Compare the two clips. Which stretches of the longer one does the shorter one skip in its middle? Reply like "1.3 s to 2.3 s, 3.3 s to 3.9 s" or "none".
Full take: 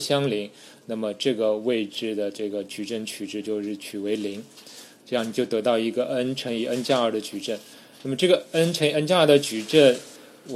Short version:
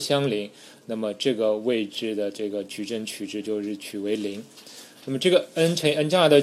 4.9 s to 7.9 s